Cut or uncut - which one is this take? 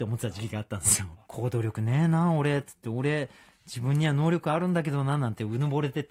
cut